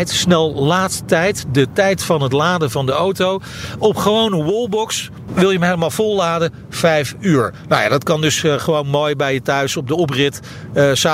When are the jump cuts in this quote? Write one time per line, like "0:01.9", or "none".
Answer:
0:05.3

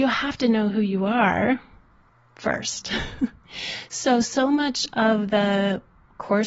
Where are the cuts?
none

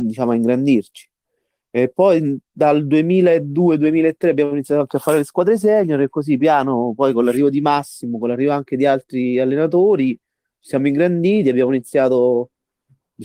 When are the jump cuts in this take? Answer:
0:06.4

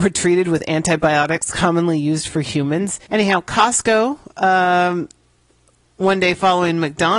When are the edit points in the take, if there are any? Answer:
0:03.1

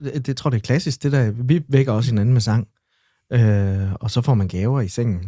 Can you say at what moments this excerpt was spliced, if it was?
none

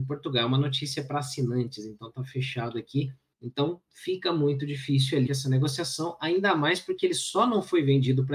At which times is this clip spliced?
0:03.3
0:05.3

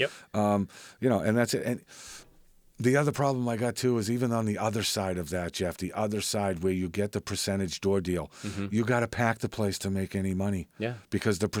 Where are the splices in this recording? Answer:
none

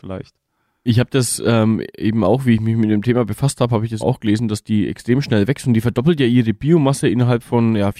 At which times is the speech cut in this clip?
0:04.0

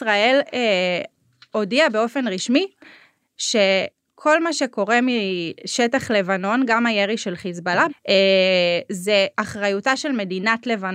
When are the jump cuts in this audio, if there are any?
0:07.9
0:09.3

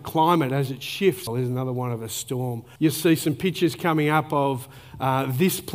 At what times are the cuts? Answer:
0:01.3
0:02.8

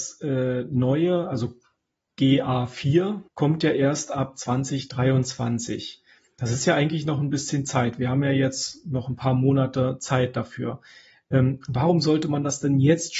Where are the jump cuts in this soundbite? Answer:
0:03.3

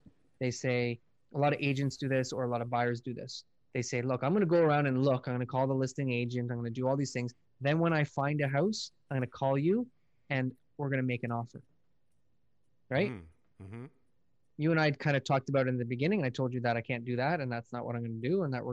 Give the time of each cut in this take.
none

